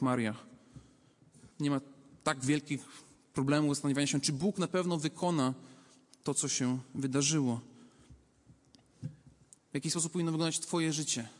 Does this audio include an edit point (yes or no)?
yes